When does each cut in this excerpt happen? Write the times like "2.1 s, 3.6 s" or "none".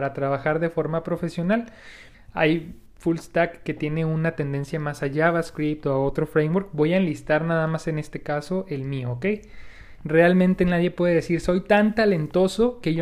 2.1 s, 10.0 s